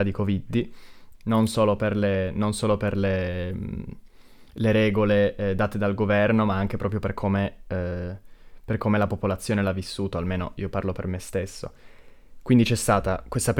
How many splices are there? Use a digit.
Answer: 1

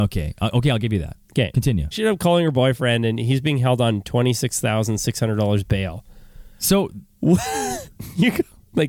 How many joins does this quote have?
1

